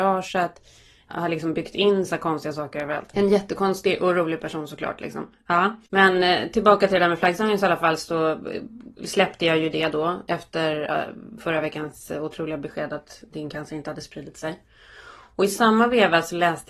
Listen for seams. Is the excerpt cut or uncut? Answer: cut